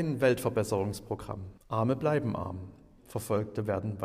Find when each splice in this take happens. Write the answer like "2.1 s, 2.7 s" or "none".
1.6 s, 3.0 s